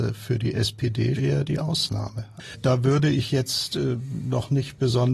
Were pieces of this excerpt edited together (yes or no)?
yes